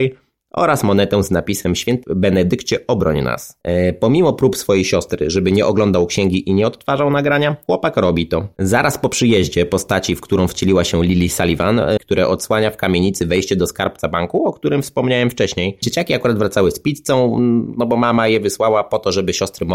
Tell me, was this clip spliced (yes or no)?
yes